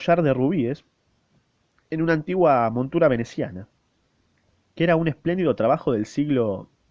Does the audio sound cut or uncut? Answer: uncut